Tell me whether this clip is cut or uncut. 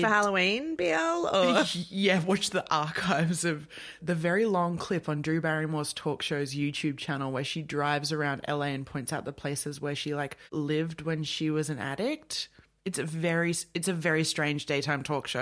cut